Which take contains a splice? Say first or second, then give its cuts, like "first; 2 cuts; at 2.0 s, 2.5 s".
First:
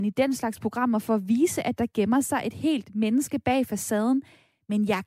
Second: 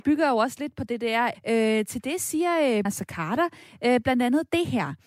second; 2 cuts; at 1.3 s, 2.9 s